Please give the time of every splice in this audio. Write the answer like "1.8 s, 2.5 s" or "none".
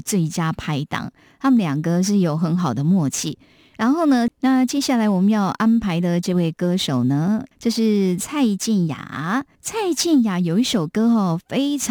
4.3 s, 7.5 s, 9.6 s